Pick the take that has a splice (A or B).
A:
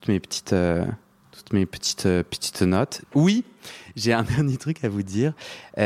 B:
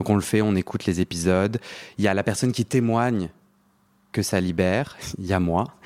A